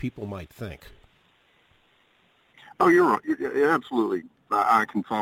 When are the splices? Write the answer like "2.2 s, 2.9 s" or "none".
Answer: none